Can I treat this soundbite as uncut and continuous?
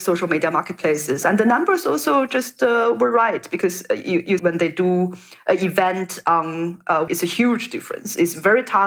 no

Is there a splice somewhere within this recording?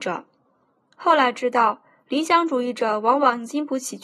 no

